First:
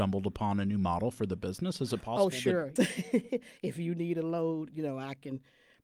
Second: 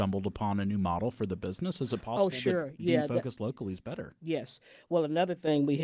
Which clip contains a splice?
first; 1 cut; at 2.8 s

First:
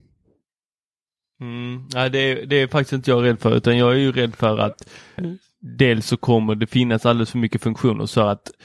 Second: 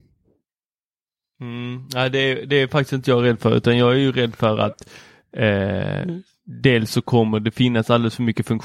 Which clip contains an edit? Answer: first; 1 cut; at 5.2 s

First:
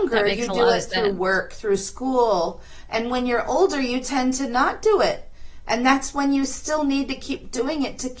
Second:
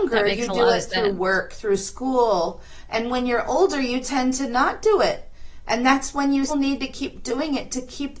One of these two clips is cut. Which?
second; 1 cut; at 6.5 s

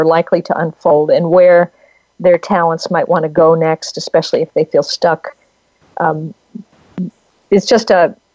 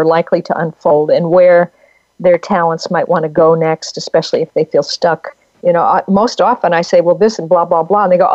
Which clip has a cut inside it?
second; 1 cut; at 5.5 s

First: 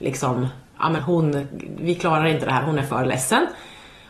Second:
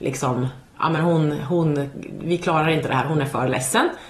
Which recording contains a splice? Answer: first; 1 cut; at 1.0 s

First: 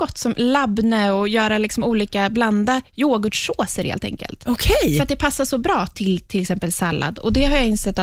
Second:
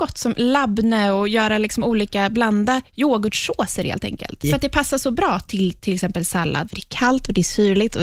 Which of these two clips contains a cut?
second; 2 cuts; at 4.4 s, 6.7 s

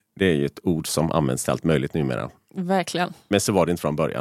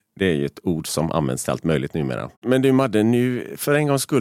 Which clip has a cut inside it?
second; 1 cut; at 2.3 s

